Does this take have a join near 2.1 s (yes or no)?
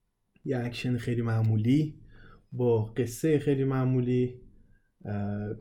no